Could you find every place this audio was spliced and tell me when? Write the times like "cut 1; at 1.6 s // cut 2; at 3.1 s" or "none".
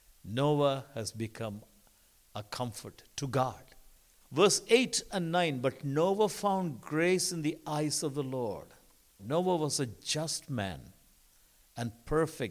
cut 1; at 4.2 s // cut 2; at 9.2 s